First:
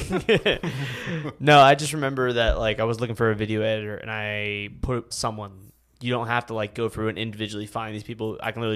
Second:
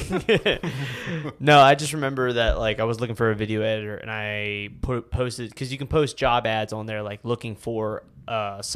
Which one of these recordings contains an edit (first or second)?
first